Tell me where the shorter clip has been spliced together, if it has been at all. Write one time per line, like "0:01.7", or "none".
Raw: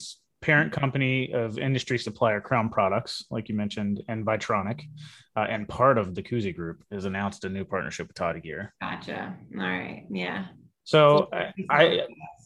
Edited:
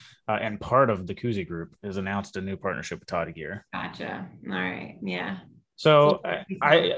none